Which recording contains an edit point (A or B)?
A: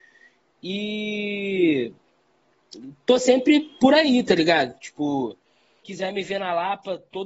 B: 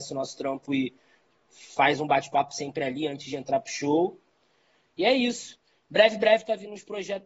A